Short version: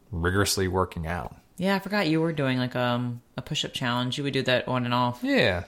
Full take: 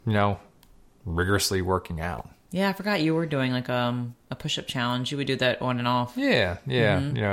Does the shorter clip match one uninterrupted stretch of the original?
yes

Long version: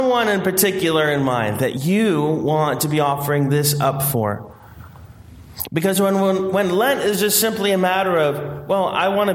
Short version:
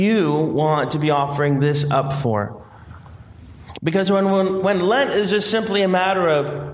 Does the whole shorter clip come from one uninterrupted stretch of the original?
yes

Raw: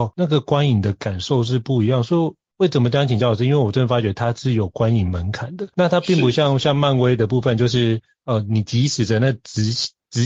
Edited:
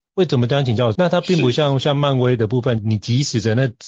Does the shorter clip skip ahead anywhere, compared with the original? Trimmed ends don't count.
yes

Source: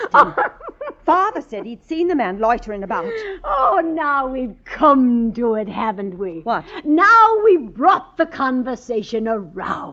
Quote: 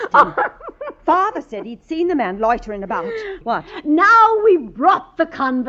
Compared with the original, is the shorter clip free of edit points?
no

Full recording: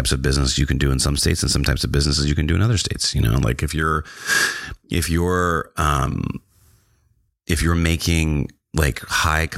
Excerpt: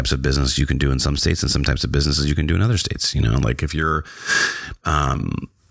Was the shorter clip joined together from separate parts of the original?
yes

